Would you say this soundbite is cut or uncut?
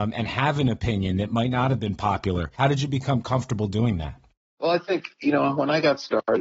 uncut